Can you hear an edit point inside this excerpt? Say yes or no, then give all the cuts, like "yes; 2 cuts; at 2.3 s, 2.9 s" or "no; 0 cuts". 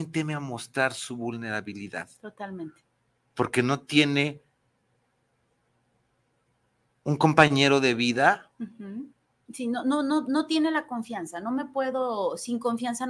yes; 1 cut; at 9.5 s